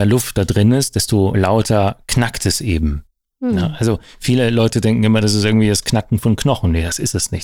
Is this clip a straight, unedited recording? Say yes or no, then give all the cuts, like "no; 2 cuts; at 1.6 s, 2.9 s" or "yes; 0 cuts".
yes; 0 cuts